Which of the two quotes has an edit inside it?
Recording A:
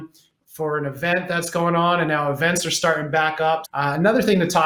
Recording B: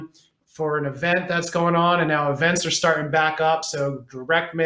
A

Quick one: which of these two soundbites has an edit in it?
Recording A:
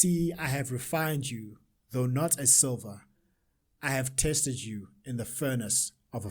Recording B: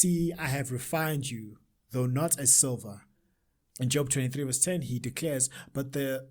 B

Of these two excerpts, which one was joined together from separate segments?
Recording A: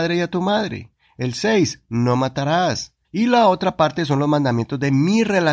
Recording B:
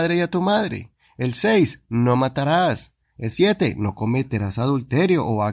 A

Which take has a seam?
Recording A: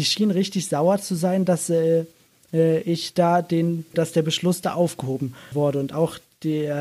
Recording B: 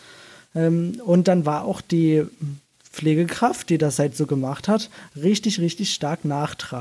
A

